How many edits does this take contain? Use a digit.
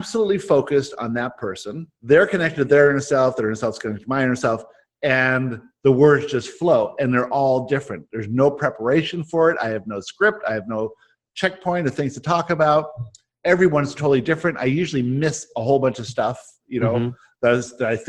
1